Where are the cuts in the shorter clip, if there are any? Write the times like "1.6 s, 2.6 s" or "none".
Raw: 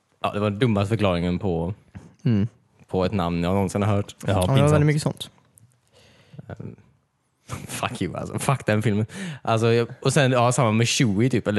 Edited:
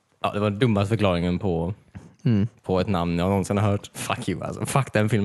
2.6 s, 3.9 s

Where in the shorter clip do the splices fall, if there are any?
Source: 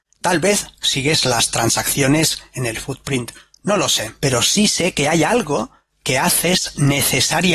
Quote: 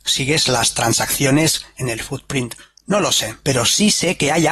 none

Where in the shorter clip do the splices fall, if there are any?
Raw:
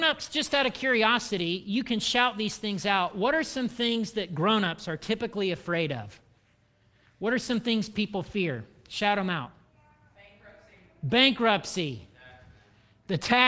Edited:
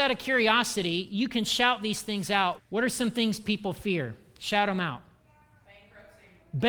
2.6 s

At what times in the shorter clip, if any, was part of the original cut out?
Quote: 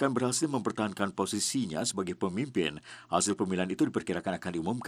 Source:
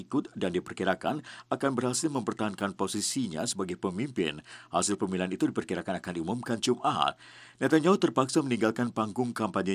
none

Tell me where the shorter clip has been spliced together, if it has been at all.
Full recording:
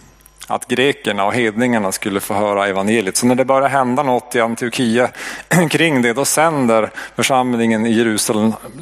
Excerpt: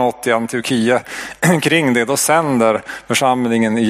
none

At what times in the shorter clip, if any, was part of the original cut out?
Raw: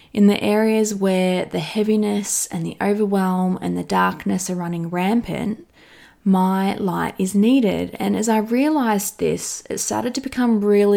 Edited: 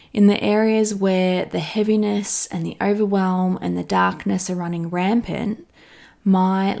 none

